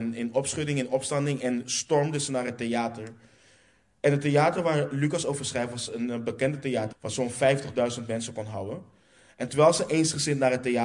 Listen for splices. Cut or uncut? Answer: cut